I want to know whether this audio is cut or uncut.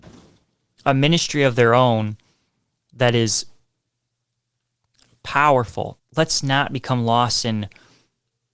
cut